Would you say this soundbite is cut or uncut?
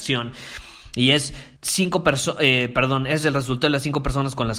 cut